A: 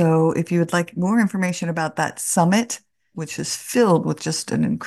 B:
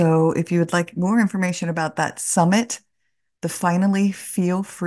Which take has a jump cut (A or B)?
A